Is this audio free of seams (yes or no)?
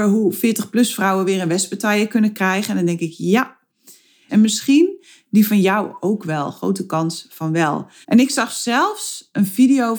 no